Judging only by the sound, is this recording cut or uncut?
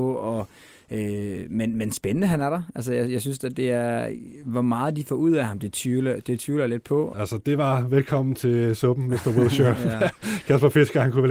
cut